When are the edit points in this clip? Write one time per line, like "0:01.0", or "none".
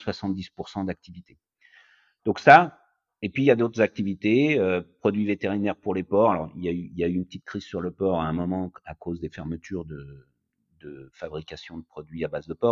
none